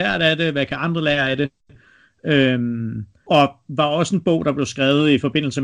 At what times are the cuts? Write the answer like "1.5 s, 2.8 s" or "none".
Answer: none